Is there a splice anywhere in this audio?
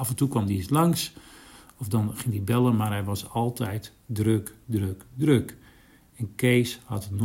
no; 0 cuts

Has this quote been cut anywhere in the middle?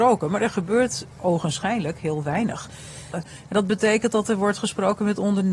yes; 2 cuts; at 1.1 s, 3.1 s

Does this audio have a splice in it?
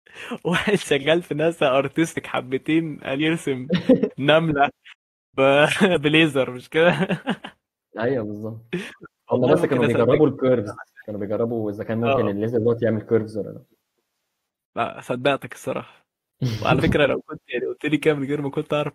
no; 0 cuts

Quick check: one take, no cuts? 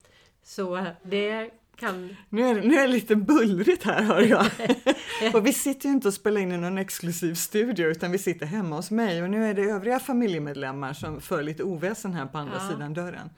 yes; 0 cuts

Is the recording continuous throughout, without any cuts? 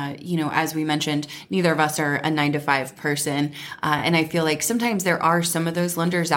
yes; 0 cuts

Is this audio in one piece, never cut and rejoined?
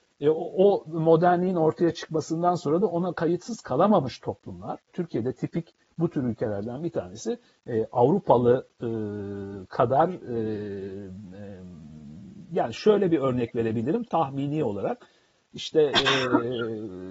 no; 3 cuts; at 4.9 s, 7.6 s, 14.0 s

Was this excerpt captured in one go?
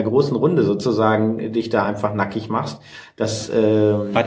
yes; 0 cuts

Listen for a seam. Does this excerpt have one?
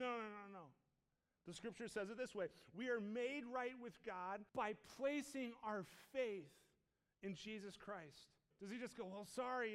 yes; 3 cuts; at 1.4 s, 4.5 s, 8.5 s

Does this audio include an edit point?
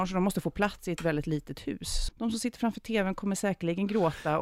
yes; 1 cut; at 2.1 s

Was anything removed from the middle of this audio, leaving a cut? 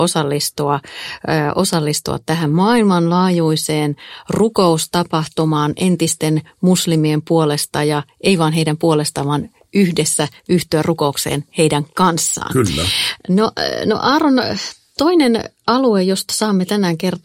no; 0 cuts

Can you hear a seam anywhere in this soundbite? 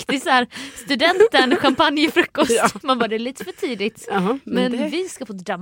no; 0 cuts

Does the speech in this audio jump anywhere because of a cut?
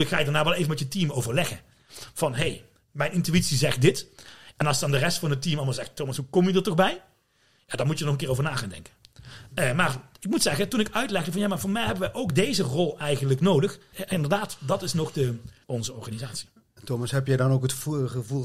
yes; 2 cuts; at 13.9 s, 15.6 s

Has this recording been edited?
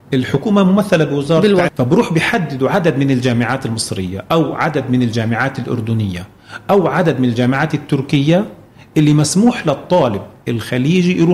yes; 1 cut; at 1.7 s

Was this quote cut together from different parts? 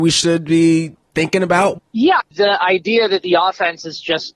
yes; 1 cut; at 2.2 s

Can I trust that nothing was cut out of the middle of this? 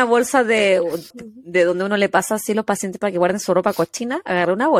no; 1 cut; at 1.1 s

